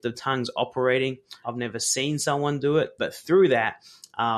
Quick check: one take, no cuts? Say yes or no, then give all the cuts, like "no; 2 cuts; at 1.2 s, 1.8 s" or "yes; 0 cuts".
no; 2 cuts; at 1.4 s, 3.0 s